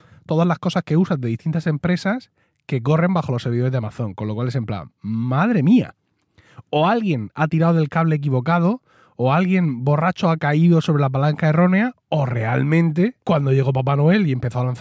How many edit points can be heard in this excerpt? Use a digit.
1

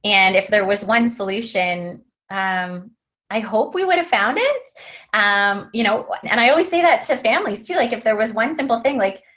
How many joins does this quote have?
1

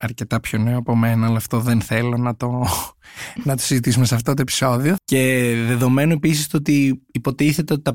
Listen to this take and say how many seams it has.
1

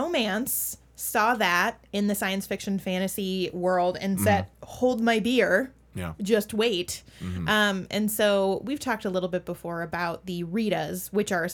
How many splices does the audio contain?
1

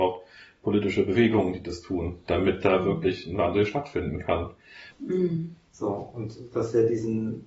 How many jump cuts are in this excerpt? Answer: 1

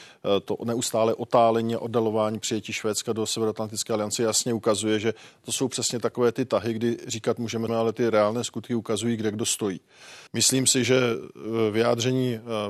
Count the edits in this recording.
2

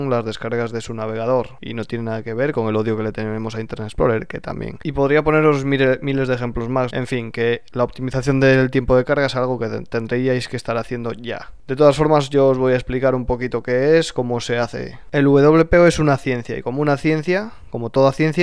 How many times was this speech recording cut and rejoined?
1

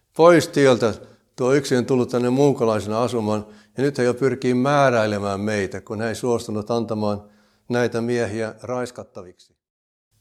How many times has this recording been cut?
0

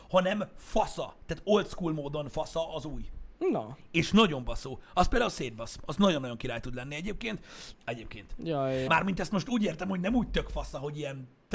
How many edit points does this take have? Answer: 2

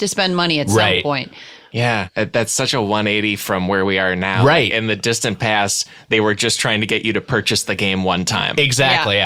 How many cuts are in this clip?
0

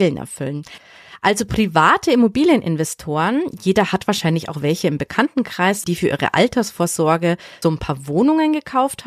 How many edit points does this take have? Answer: 2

